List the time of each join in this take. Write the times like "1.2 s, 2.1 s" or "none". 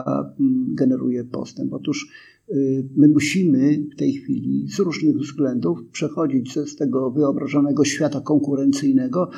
6.5 s